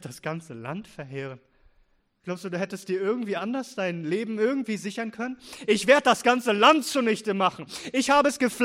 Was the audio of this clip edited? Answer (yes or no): no